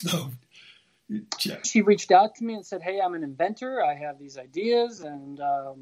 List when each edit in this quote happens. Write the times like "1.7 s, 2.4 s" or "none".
1.6 s